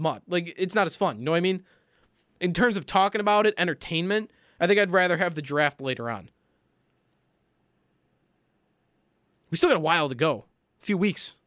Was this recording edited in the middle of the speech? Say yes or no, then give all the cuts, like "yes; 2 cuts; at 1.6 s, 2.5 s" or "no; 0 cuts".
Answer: no; 0 cuts